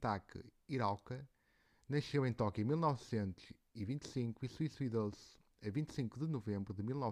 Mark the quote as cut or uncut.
uncut